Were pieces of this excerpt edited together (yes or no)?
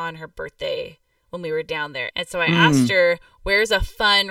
yes